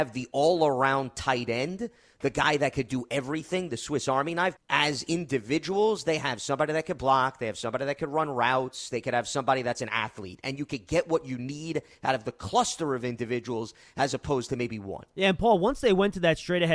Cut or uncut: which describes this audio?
cut